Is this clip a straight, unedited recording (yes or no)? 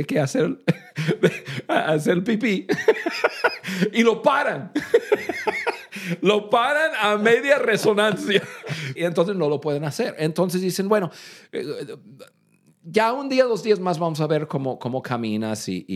no